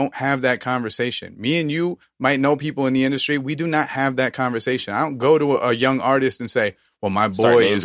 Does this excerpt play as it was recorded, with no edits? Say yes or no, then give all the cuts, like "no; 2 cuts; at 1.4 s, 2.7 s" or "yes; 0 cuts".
yes; 0 cuts